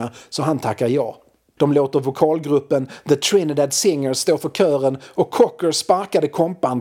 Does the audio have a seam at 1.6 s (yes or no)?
yes